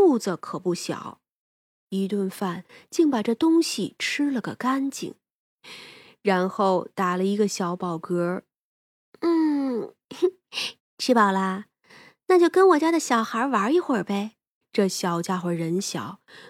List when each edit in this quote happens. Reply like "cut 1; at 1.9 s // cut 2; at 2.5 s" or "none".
cut 1; at 10.8 s // cut 2; at 14.6 s